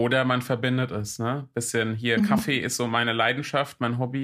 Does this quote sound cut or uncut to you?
uncut